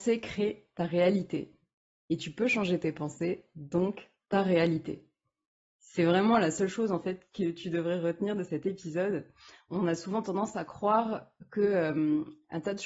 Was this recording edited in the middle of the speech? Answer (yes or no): no